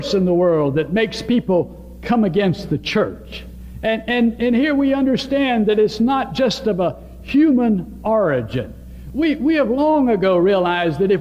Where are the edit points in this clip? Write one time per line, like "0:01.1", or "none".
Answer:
none